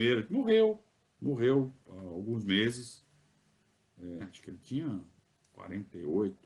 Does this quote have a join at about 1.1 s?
no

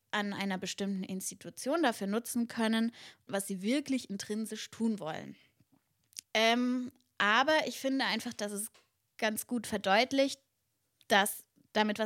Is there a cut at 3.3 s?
yes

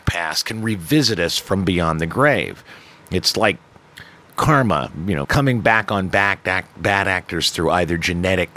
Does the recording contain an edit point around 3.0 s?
no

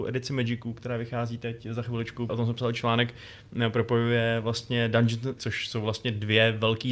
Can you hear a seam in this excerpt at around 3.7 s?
no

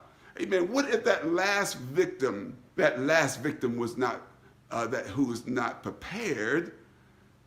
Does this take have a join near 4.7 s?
no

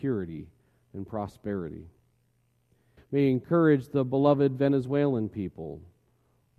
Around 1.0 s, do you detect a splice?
no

